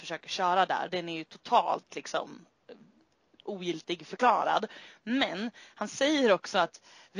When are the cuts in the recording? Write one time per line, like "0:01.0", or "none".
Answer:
none